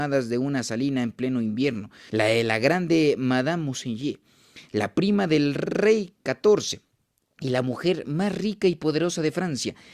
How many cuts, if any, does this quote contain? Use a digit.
1